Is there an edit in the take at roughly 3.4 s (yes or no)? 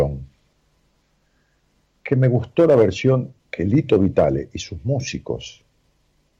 yes